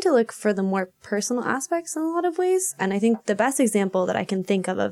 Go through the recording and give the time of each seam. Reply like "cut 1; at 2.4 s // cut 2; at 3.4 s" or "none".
none